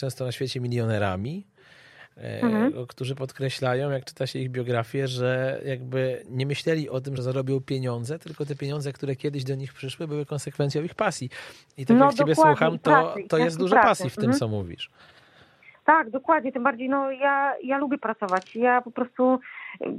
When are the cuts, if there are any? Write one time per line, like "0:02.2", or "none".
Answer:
none